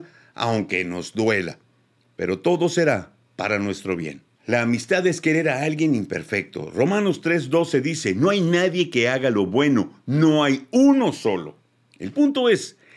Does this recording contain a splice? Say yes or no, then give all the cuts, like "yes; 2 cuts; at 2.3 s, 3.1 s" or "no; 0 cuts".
no; 0 cuts